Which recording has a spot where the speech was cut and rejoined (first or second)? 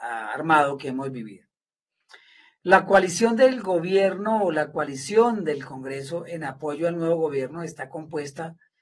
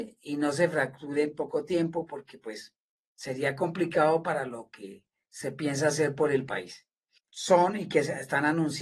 second